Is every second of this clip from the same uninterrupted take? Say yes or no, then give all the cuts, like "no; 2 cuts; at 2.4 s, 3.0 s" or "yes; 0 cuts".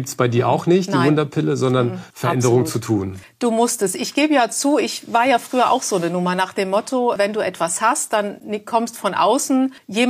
no; 1 cut; at 2.1 s